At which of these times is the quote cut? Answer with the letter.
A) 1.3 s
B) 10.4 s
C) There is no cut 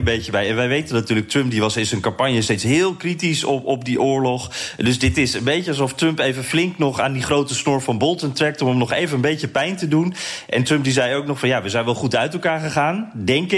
C